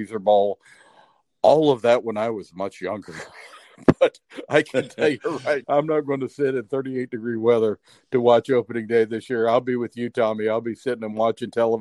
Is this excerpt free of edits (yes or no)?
no